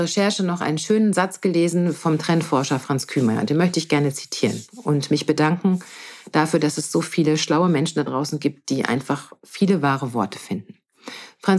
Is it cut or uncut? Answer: uncut